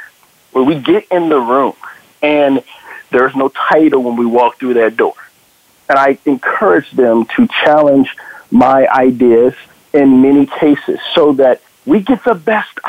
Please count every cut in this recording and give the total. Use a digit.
0